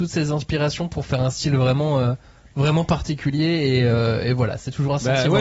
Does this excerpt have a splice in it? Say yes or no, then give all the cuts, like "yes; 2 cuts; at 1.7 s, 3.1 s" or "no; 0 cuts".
no; 0 cuts